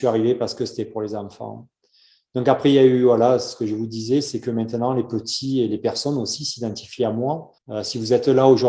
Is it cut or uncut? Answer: uncut